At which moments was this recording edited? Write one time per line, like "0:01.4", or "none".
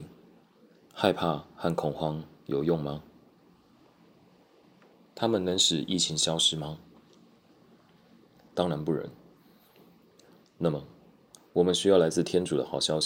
none